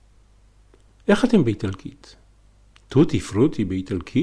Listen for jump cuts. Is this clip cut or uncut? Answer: uncut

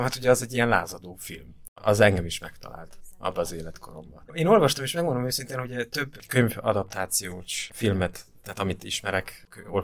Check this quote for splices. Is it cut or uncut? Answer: cut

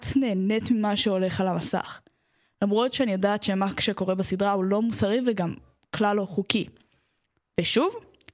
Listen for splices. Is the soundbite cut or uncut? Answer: uncut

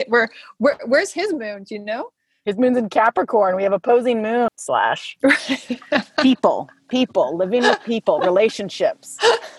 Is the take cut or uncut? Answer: cut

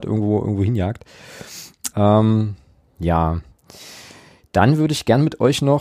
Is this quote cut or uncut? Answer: cut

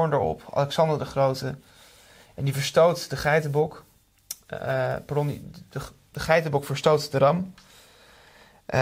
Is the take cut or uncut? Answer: uncut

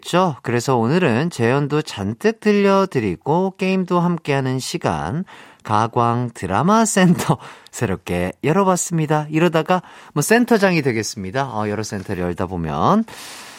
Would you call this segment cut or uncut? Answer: uncut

